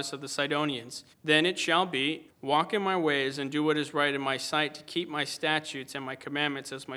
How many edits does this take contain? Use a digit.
2